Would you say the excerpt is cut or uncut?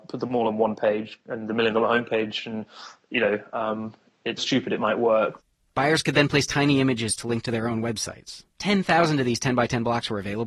cut